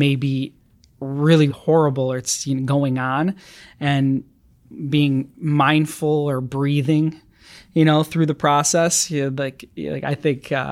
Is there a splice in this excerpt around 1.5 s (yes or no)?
yes